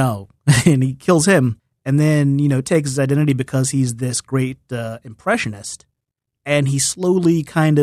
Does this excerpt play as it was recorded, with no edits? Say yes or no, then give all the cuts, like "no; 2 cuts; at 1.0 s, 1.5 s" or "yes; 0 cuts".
yes; 0 cuts